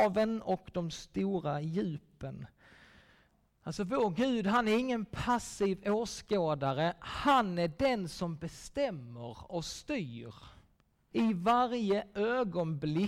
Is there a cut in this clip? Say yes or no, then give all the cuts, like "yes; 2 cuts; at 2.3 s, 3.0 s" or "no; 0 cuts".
yes; 1 cut; at 11.1 s